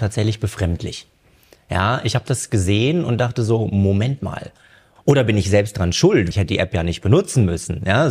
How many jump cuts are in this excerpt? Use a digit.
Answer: 2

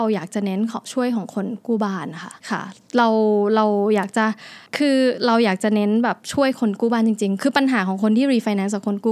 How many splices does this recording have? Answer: 2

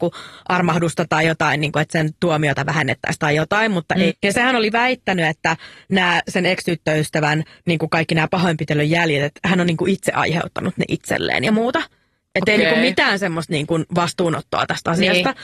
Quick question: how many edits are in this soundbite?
1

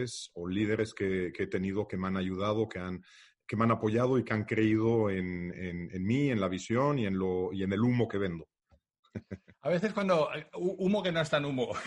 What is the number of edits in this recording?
0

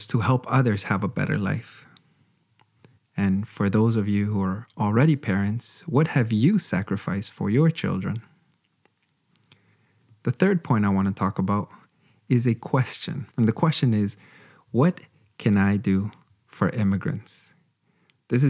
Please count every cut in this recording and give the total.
2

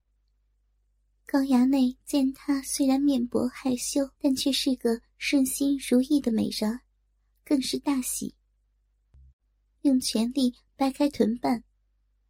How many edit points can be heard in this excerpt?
2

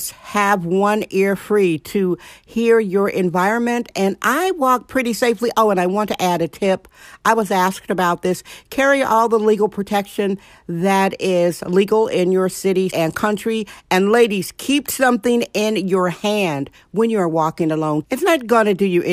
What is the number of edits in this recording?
2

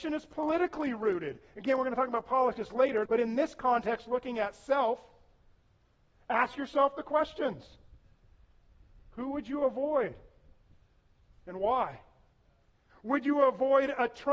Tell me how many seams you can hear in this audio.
2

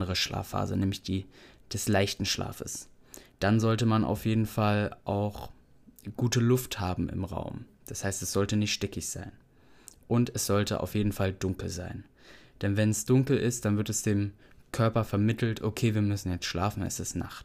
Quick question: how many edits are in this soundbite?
1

